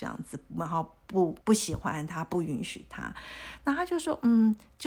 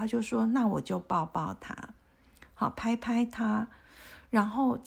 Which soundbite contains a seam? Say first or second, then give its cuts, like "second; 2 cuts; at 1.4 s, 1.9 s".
first; 1 cut; at 1.4 s